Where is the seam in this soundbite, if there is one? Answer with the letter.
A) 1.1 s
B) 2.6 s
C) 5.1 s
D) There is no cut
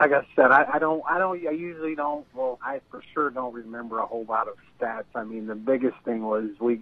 B